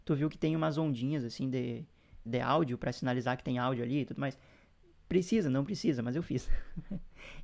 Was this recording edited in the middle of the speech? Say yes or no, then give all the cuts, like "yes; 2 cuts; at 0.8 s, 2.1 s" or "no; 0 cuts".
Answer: yes; 1 cut; at 2.3 s